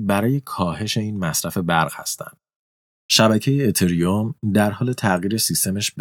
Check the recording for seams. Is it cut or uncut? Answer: uncut